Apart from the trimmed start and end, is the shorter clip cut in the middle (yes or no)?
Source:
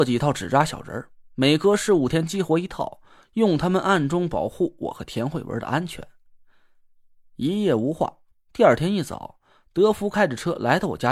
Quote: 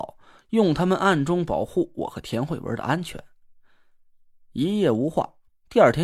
no